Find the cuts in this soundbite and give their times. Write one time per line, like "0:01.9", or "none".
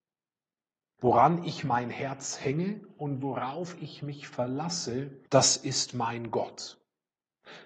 0:01.0
0:05.3